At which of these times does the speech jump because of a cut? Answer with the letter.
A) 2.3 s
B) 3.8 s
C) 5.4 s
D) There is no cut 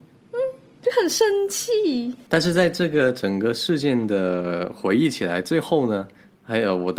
A